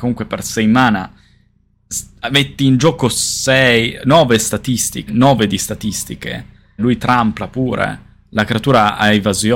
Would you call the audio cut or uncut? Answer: cut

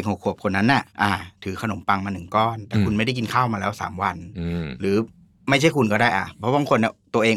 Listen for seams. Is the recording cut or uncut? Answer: cut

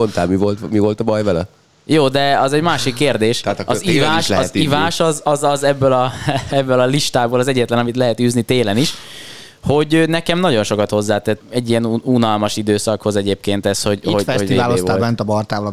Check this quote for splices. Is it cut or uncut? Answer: cut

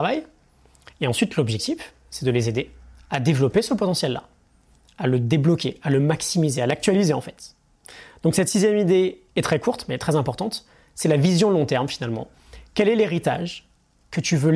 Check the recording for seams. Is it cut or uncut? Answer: uncut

